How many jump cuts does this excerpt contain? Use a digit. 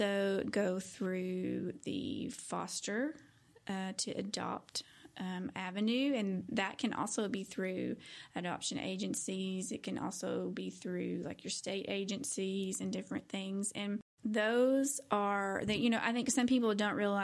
0